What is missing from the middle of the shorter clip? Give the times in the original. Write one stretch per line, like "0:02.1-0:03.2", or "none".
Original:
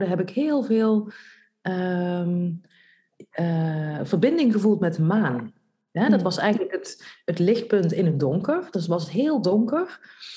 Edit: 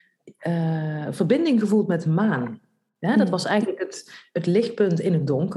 none